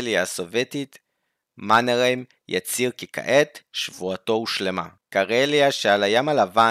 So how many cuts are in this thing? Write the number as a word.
one